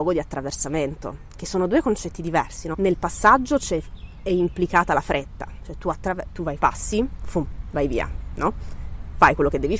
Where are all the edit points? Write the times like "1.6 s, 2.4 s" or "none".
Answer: 2.7 s, 6.6 s